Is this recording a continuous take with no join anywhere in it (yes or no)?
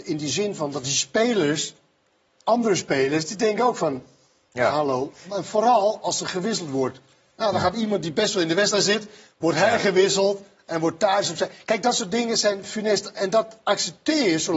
yes